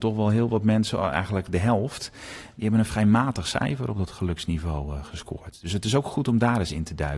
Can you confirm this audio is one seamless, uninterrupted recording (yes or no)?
yes